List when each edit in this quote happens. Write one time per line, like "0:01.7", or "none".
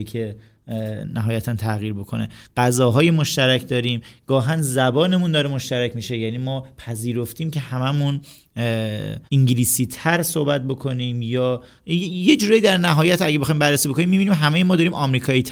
0:09.3